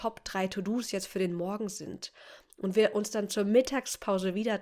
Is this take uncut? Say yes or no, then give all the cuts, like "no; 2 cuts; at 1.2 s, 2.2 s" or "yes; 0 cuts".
yes; 0 cuts